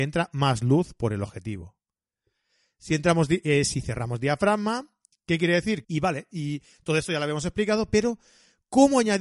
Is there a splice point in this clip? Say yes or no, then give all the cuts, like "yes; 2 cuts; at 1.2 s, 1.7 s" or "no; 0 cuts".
yes; 1 cut; at 5.8 s